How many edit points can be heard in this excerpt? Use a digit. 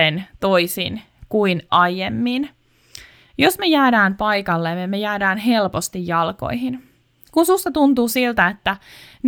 0